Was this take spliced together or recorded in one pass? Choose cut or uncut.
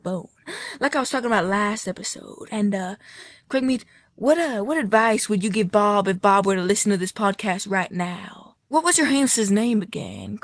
cut